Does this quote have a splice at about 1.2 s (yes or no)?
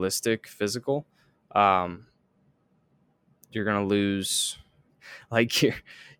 no